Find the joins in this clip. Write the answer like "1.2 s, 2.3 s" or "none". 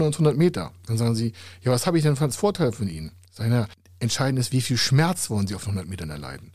none